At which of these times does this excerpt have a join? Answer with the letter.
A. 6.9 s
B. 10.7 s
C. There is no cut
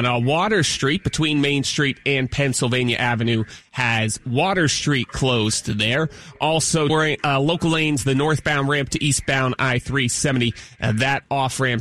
A